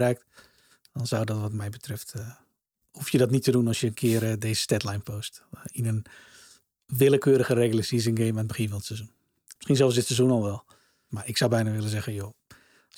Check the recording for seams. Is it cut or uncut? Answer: cut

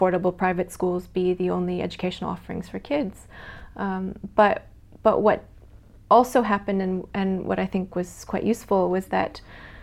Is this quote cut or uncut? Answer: uncut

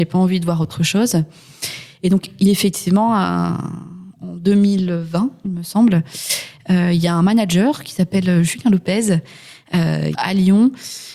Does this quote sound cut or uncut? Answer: cut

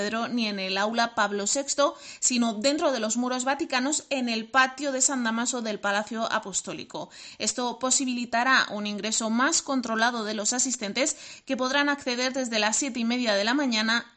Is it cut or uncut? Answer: uncut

